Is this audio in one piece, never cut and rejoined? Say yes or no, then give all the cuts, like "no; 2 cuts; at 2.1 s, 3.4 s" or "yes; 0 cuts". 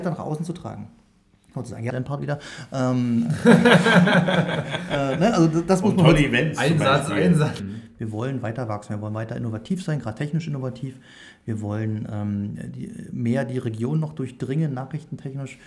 no; 2 cuts; at 1.9 s, 7.6 s